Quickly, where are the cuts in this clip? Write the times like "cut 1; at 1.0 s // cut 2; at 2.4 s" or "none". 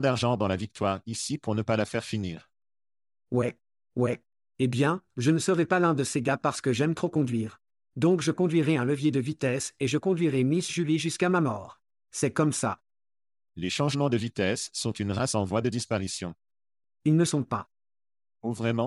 cut 1; at 16.8 s

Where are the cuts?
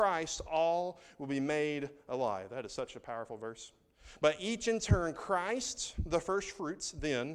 none

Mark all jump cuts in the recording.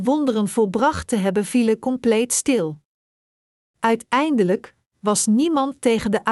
none

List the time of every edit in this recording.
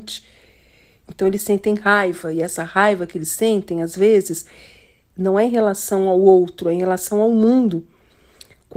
none

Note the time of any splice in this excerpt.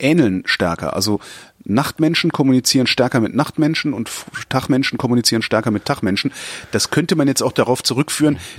none

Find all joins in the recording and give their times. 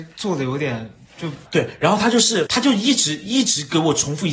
cut 1; at 1.5 s // cut 2; at 2.5 s

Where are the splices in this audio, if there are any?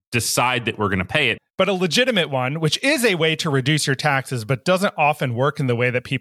cut 1; at 1.4 s

